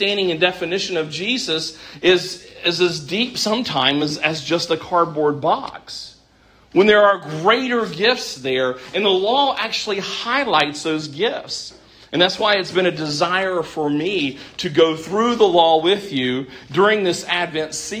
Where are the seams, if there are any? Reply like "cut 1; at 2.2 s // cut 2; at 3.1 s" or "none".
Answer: none